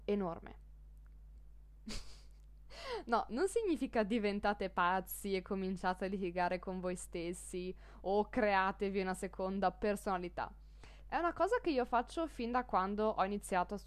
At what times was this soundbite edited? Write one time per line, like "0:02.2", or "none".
0:01.3
0:11.0

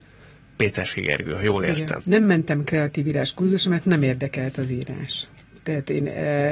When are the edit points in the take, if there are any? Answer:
0:02.0

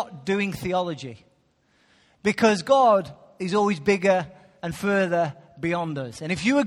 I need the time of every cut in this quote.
none

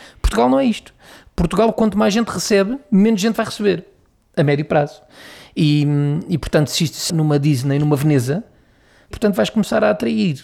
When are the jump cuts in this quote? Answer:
0:07.1
0:09.1

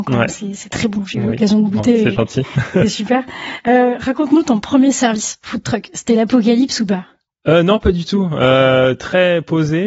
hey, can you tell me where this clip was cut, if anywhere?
none

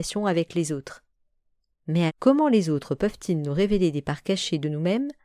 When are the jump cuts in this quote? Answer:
0:02.1

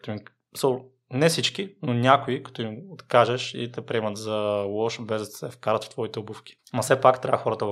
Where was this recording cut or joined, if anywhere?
0:06.6

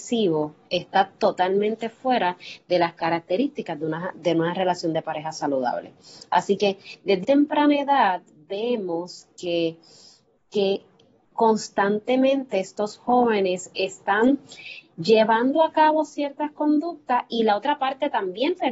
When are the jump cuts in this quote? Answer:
0:07.2

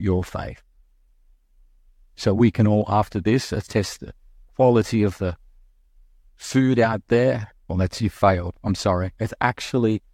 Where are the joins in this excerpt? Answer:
0:07.7
0:09.2

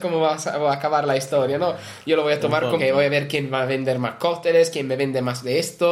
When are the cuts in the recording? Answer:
0:02.8

